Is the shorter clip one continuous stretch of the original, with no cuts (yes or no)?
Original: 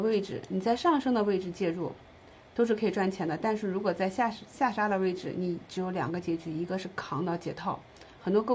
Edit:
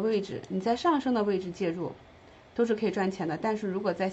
yes